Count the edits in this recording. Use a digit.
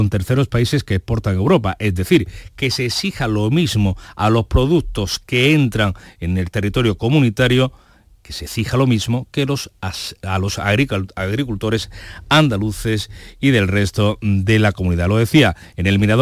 0